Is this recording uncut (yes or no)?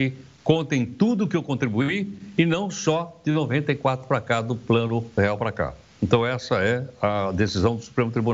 yes